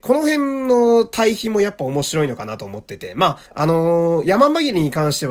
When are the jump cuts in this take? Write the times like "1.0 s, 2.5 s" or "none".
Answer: 3.4 s